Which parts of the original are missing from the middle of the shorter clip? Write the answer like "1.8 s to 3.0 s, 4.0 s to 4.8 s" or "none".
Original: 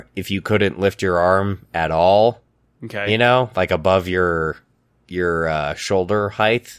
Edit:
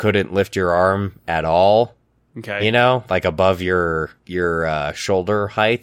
4.6 s to 5.0 s